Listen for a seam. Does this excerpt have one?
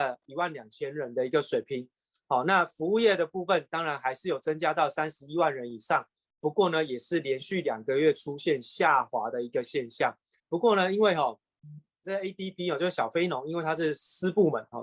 yes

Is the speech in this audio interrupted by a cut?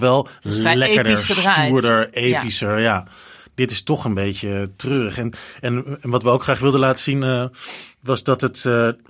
no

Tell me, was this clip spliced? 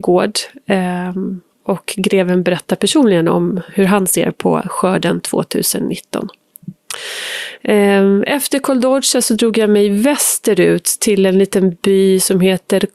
no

